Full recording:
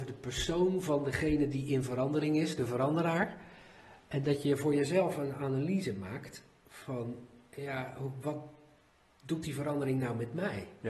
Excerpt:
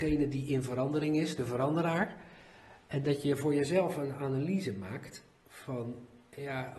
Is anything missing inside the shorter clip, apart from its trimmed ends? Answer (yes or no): no